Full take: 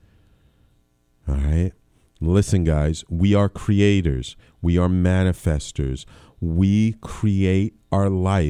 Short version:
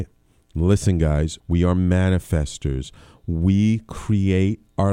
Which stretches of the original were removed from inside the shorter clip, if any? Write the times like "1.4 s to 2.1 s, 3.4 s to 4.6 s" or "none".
3.1 s to 4.5 s